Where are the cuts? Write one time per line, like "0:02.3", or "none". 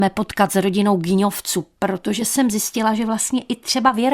none